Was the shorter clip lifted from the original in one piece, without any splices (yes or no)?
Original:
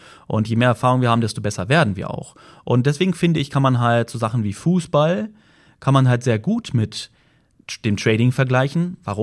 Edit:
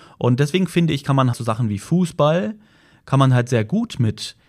no